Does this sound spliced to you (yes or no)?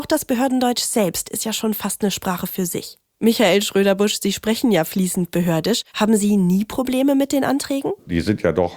yes